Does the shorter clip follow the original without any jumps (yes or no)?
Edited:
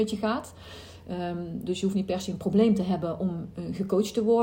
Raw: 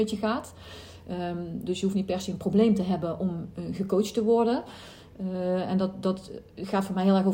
yes